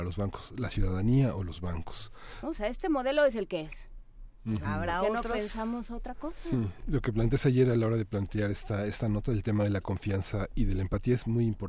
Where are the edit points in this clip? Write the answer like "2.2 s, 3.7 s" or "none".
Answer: 2.4 s